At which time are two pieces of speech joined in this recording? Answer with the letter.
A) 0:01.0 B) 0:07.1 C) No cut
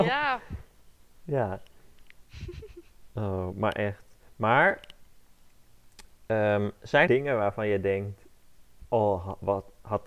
B